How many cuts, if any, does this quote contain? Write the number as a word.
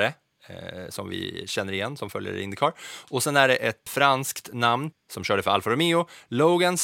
two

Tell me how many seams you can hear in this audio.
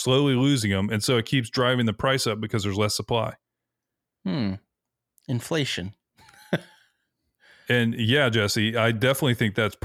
zero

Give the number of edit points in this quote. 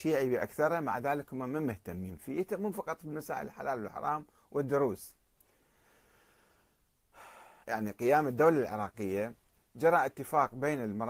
one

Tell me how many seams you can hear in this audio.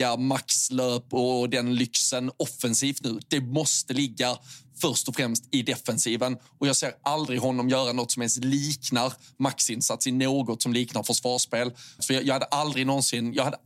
two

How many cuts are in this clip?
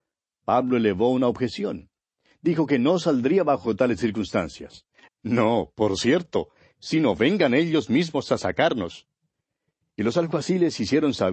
one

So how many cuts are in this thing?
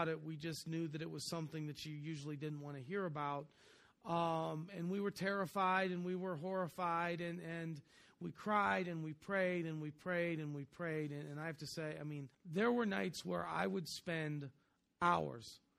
one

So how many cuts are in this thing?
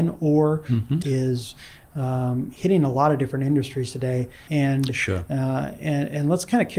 two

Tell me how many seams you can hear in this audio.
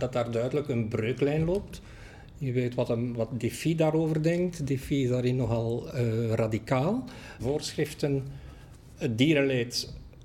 one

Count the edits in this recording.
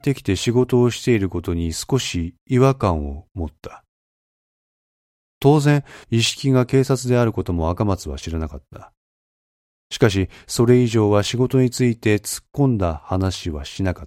one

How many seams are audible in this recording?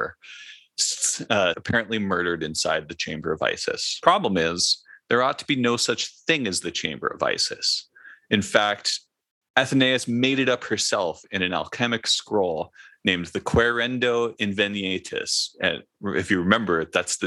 one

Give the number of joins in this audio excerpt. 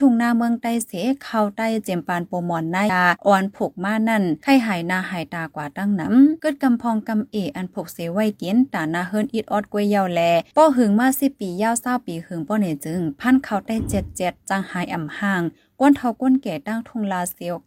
one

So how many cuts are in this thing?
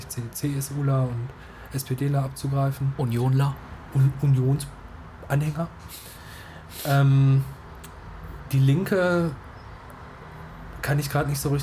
zero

